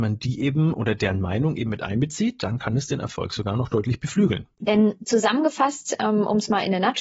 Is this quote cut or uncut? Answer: cut